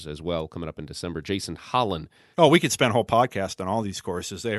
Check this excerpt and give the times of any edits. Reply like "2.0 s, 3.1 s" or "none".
2.3 s